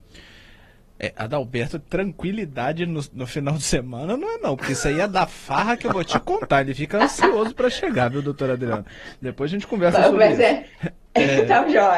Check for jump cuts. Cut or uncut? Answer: uncut